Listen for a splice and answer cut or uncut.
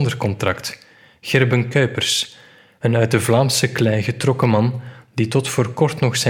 uncut